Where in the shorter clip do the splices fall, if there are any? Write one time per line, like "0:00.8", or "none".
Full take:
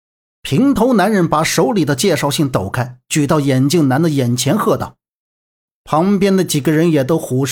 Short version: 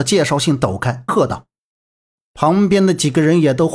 0:01.1